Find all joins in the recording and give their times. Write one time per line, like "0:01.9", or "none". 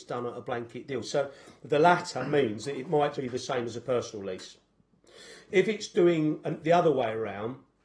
0:01.0
0:03.1